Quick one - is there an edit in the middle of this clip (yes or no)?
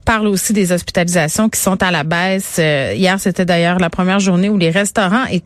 no